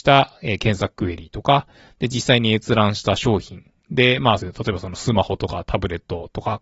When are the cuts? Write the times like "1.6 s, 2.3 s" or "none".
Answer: 4.4 s